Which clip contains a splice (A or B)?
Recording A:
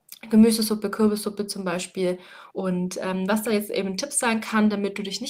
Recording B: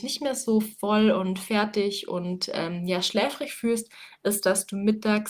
A